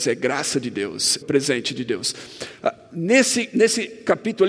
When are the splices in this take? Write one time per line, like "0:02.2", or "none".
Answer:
0:01.2